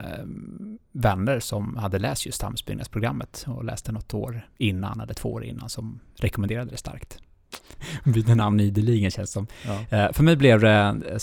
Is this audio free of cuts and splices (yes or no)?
no